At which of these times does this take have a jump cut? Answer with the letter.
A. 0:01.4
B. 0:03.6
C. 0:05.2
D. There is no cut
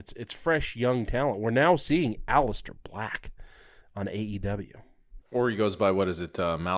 C